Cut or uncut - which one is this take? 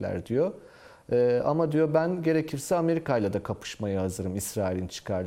uncut